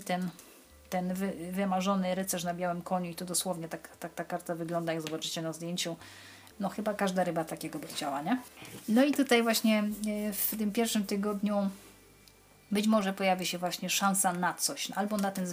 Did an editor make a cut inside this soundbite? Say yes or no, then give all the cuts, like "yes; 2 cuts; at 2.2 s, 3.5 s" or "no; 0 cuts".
yes; 1 cut; at 6.5 s